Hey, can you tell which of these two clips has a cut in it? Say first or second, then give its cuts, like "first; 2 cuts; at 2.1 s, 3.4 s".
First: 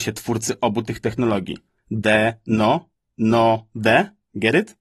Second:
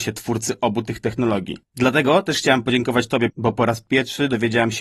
second; 2 cuts; at 1.6 s, 3.3 s